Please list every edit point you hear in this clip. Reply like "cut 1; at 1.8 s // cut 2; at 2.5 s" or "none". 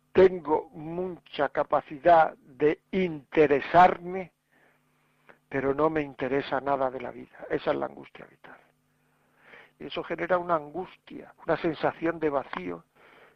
cut 1; at 9.8 s // cut 2; at 11.4 s